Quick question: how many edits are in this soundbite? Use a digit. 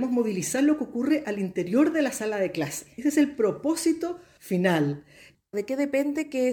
1